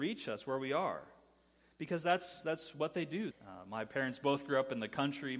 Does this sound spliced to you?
yes; 1 cut; at 3.3 s

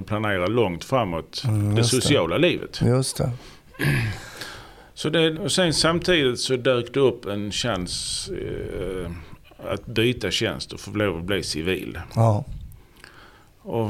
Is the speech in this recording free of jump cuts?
no; 1 cut; at 5.3 s

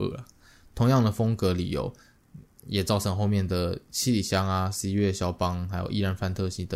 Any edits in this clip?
no; 0 cuts

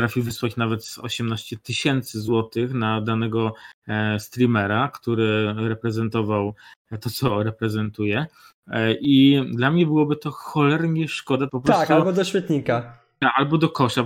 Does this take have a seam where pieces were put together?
yes; 1 cut; at 11.5 s

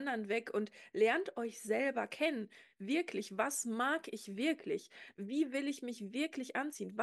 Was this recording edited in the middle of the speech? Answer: no; 0 cuts

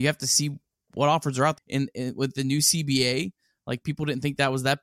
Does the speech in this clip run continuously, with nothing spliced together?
no; 1 cut; at 1.6 s

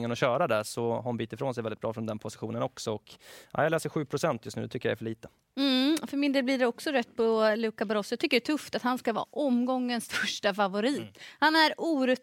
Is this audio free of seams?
yes; 0 cuts

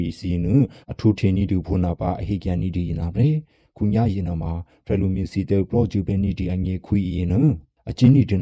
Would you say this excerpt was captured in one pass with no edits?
yes; 0 cuts

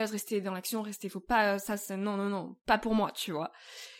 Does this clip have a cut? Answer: no; 0 cuts

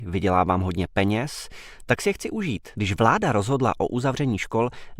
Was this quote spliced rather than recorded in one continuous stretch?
yes; 1 cut; at 2.7 s

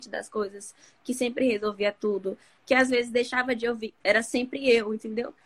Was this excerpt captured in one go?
no; 1 cut; at 4.0 s

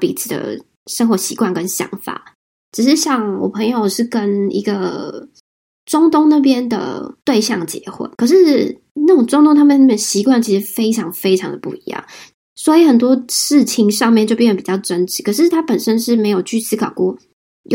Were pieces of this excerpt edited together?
no; 0 cuts

